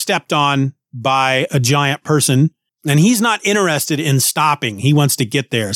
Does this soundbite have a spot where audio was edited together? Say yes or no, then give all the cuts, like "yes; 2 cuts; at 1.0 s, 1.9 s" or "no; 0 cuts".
yes; 2 cuts; at 1.5 s, 2.7 s